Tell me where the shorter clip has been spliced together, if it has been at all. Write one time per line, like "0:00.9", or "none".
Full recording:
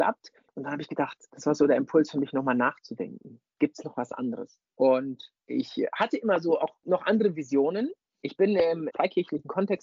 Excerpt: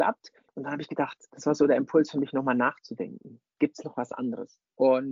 none